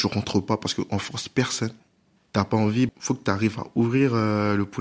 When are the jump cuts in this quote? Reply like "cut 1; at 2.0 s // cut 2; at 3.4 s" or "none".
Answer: cut 1; at 2.9 s